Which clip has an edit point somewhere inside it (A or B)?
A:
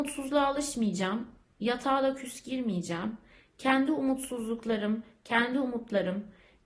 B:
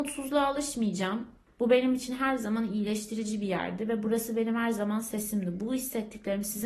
B